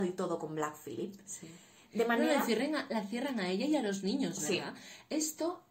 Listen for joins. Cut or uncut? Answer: uncut